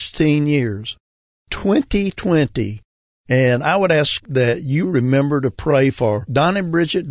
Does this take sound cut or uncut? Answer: cut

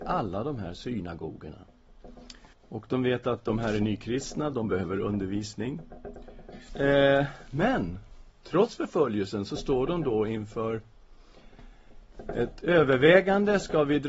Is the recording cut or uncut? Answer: cut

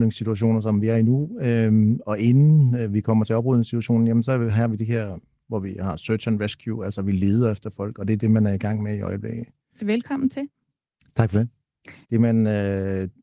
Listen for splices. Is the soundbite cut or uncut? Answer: cut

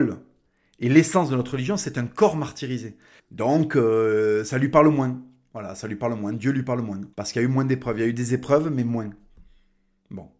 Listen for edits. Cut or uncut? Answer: cut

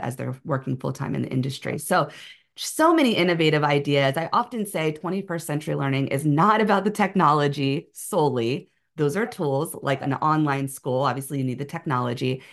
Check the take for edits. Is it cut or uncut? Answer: uncut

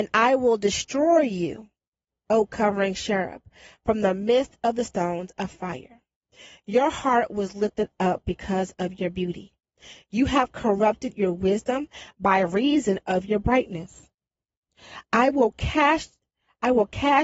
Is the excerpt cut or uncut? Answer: uncut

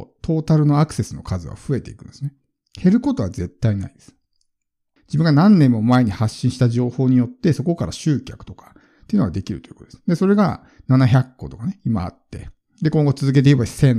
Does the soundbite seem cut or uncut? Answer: cut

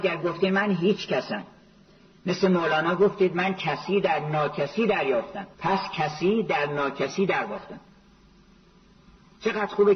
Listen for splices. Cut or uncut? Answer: cut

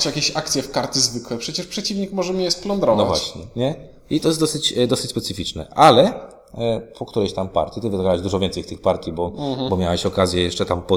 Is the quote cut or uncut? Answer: uncut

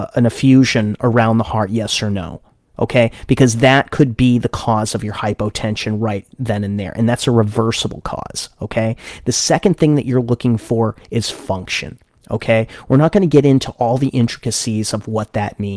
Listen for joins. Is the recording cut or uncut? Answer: uncut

